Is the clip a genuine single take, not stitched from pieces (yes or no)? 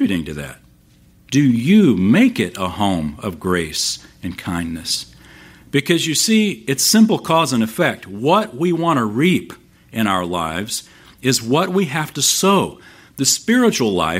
yes